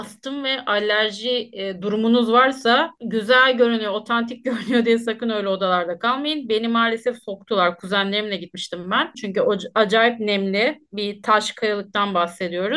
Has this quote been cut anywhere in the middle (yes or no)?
yes